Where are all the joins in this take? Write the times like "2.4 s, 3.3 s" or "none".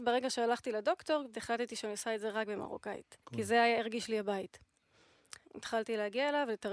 1.3 s, 3.2 s, 5.4 s